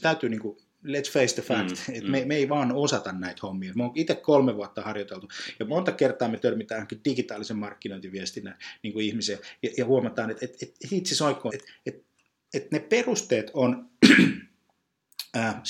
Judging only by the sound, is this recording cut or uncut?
cut